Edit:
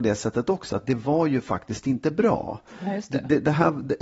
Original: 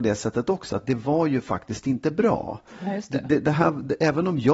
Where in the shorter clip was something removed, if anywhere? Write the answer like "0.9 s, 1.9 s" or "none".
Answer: none